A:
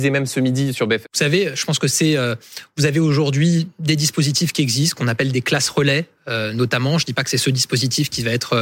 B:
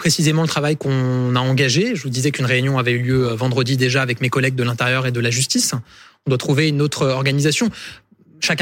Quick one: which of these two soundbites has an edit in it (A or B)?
A